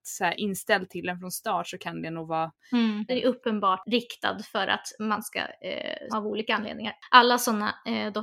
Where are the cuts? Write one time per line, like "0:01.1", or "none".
0:03.1
0:06.1